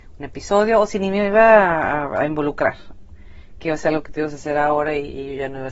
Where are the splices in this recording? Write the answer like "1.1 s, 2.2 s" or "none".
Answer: none